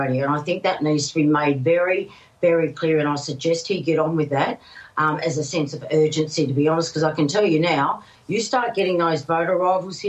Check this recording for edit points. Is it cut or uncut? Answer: uncut